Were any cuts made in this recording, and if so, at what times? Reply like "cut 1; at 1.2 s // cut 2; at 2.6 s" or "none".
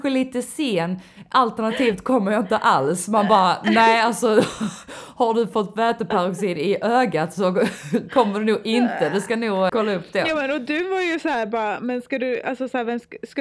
cut 1; at 9.7 s